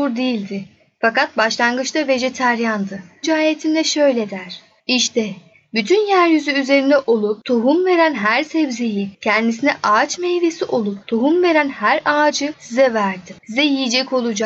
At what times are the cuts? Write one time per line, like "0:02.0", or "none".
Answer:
0:03.2

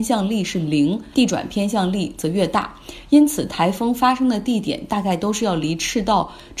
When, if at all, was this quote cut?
0:01.1

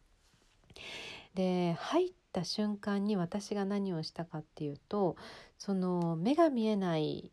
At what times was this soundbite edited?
0:01.3

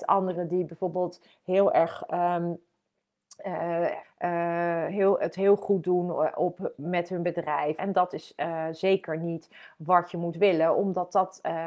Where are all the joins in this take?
0:04.0
0:07.8

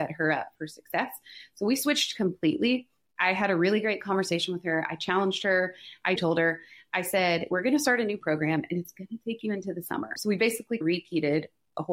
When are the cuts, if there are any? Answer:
0:06.2
0:10.2

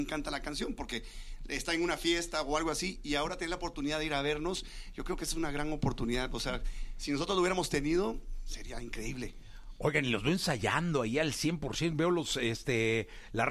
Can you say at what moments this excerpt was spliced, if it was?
none

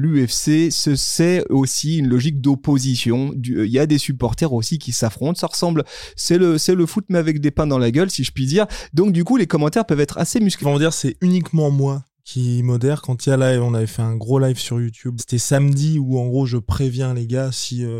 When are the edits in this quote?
0:10.6
0:15.2

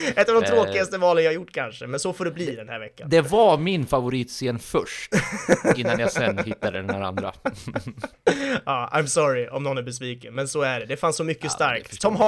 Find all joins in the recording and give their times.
none

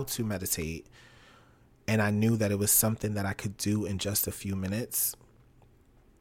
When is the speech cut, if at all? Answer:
none

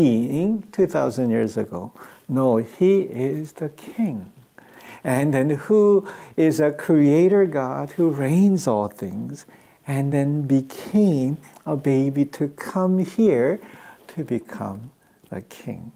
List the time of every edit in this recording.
none

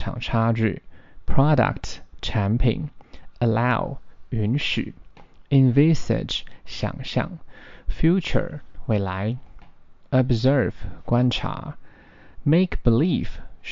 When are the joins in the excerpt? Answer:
none

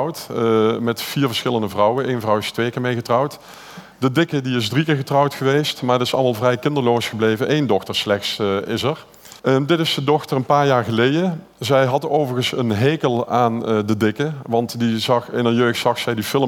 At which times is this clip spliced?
0:09.4

